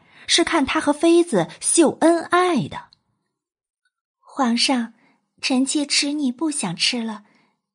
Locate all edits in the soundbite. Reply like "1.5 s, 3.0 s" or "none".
none